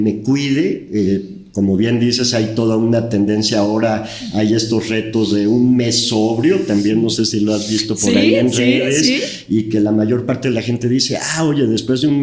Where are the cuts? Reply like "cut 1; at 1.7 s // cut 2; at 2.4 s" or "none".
none